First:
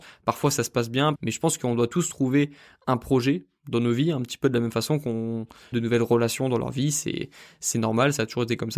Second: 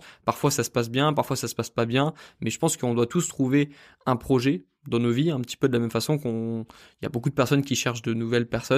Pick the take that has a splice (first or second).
first